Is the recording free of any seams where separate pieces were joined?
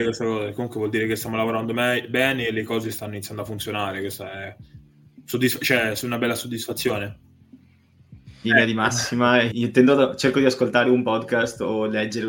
no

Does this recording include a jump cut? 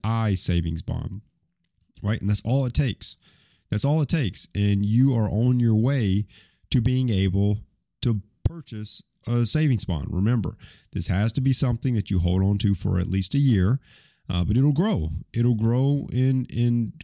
no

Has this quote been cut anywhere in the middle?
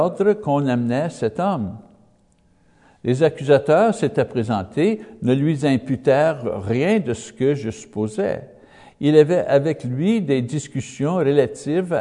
no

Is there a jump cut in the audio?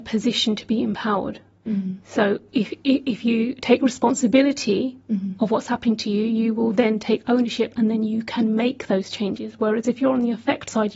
no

